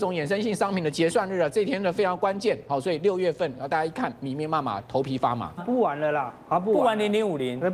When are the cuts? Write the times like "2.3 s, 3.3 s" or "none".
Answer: 5.6 s